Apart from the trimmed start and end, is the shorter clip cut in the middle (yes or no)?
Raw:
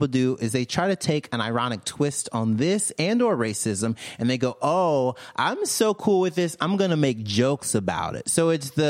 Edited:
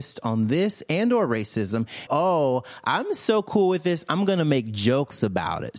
yes